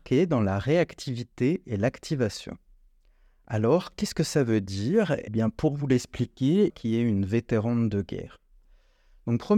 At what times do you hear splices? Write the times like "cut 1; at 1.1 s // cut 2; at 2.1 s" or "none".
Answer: cut 1; at 5.3 s // cut 2; at 6.7 s